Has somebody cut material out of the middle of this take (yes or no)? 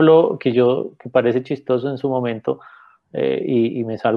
no